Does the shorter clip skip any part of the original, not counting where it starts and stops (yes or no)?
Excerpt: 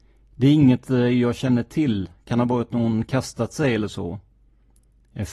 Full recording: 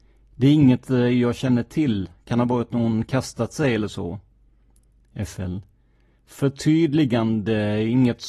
no